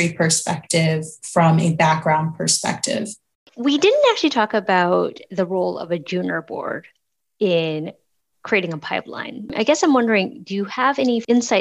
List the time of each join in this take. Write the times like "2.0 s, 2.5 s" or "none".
none